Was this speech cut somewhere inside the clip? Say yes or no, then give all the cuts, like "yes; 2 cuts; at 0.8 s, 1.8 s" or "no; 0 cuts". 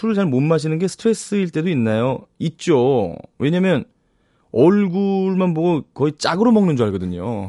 no; 0 cuts